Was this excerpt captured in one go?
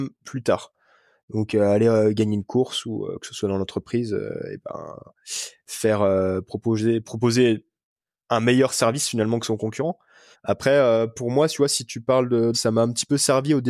no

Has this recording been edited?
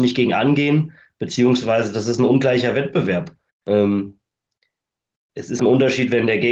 yes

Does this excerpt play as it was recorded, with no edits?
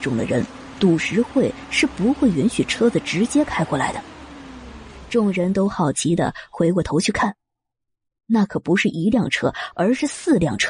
yes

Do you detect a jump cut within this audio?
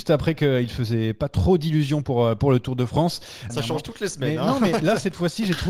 yes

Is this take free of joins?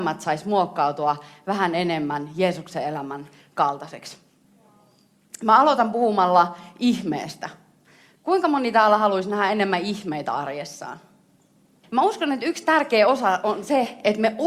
no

